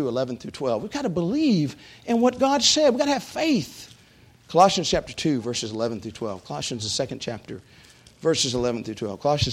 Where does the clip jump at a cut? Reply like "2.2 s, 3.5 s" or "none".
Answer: none